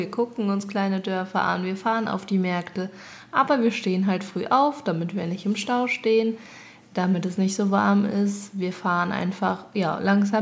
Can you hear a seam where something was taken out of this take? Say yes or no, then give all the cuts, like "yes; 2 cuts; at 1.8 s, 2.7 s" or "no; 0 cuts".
no; 0 cuts